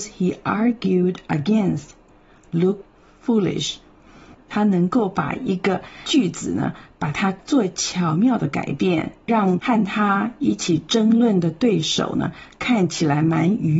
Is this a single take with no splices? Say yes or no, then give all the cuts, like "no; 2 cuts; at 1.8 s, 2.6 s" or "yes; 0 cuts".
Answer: yes; 0 cuts